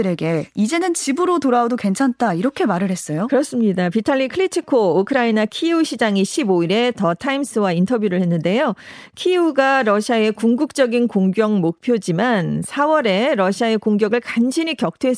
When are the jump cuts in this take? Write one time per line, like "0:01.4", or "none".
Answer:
none